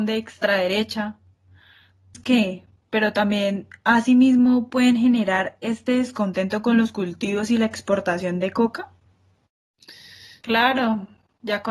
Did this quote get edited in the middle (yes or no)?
yes